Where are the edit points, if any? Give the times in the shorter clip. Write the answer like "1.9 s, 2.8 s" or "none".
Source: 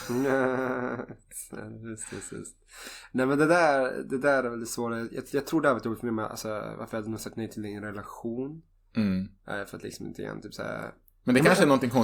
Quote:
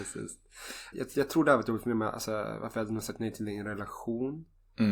0.9 s

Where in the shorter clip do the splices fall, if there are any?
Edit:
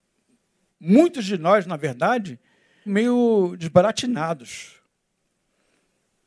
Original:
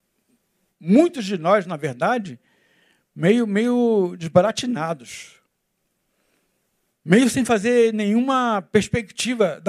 2.9 s

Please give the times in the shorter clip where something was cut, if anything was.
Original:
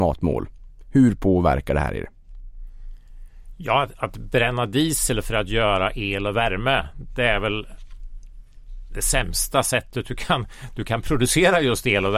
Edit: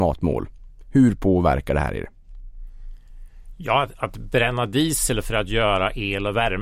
none

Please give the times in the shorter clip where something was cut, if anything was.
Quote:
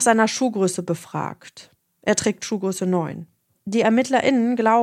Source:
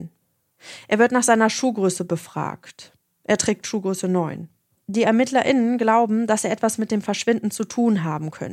none

